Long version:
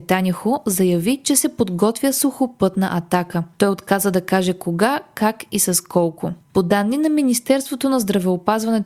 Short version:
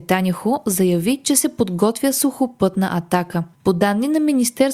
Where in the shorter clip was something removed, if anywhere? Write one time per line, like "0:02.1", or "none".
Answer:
0:03.5